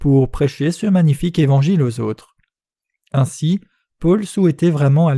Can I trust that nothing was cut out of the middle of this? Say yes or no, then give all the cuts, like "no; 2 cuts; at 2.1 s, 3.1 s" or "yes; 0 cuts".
yes; 0 cuts